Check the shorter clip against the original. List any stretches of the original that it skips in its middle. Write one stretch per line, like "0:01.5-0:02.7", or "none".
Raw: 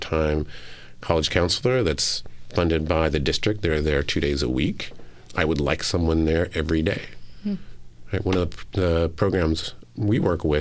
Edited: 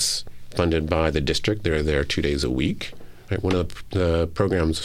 0:05.3-0:08.1

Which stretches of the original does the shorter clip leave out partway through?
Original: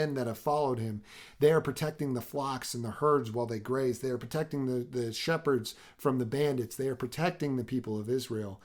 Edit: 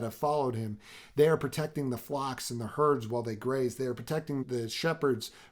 0:04.7-0:04.9

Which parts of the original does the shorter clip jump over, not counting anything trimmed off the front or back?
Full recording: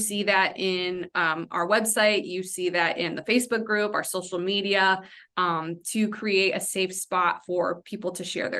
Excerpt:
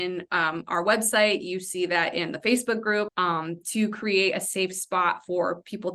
0:03.9-0:05.3

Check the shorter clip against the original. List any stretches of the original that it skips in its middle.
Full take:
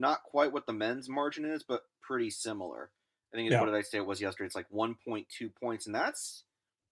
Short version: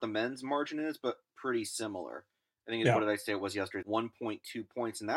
0:04.5-0:04.7

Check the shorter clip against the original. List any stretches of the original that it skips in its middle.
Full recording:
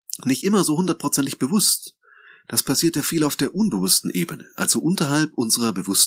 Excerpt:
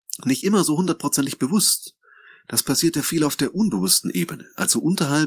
none

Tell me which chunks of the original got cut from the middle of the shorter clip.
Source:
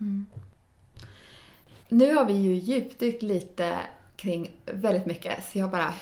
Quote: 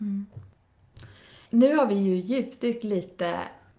0:01.5-0:01.8

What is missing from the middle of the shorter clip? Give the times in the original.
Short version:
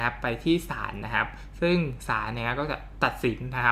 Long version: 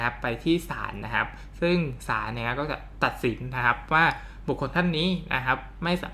none

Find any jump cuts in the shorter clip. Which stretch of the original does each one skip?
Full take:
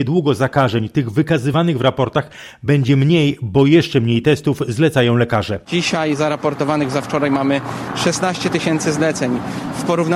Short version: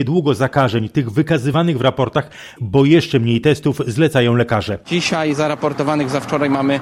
0:02.6-0:03.4

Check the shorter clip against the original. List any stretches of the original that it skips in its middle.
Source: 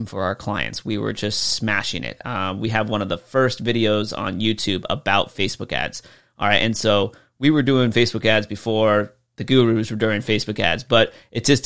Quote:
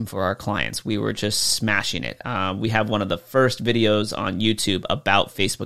none

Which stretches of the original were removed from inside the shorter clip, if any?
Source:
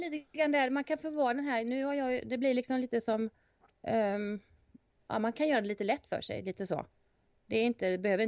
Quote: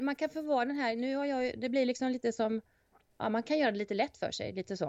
0:03.8-0:05.0

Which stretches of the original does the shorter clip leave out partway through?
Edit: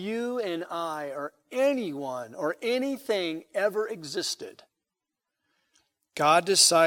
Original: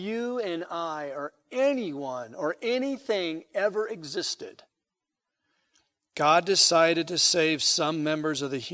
none

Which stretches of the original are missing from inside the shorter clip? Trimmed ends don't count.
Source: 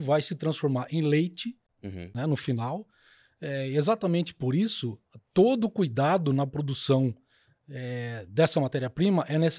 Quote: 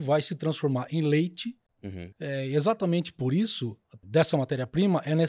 0:02.1-0:03.3
0:05.2-0:08.3

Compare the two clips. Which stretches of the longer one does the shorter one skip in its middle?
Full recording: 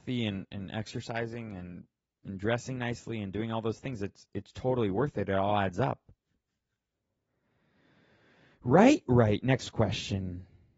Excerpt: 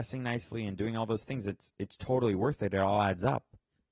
none

